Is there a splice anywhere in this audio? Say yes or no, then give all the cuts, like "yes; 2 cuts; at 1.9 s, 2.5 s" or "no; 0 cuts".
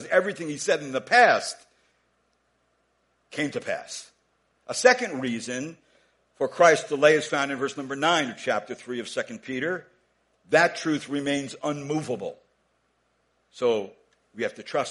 yes; 3 cuts; at 4.6 s, 10.3 s, 13.3 s